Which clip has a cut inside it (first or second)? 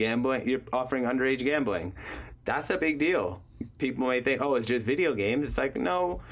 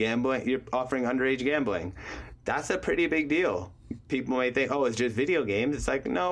first